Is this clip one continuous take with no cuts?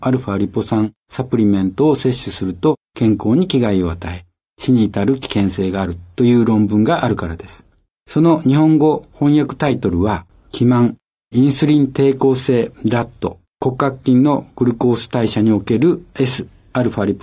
no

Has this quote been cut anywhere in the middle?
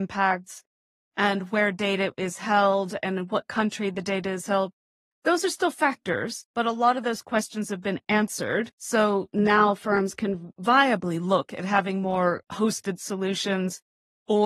no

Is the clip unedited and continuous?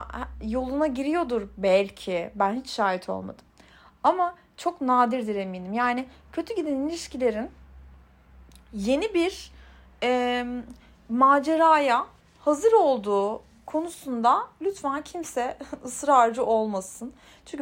yes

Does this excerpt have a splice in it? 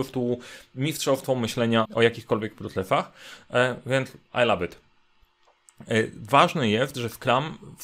yes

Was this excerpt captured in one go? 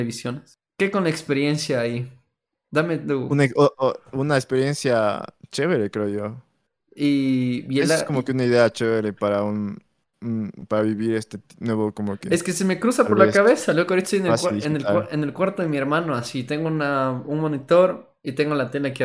yes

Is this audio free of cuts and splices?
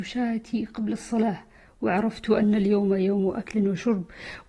yes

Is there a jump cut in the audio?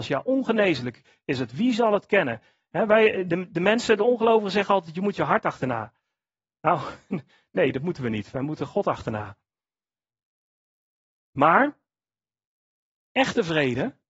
no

